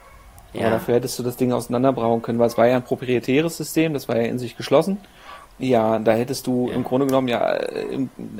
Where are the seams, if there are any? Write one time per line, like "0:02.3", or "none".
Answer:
0:05.4